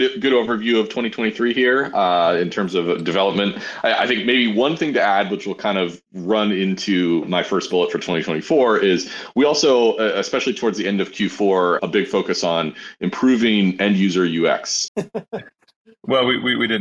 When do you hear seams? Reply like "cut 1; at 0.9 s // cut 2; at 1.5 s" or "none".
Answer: cut 1; at 11.8 s // cut 2; at 14.9 s